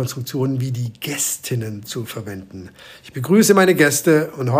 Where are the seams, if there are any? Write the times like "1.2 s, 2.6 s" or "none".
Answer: none